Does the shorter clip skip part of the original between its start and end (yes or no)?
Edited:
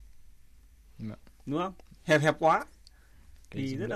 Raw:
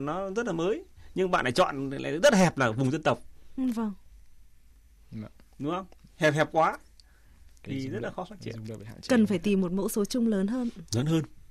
no